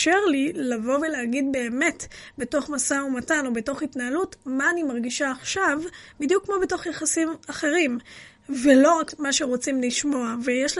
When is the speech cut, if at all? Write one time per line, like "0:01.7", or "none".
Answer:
none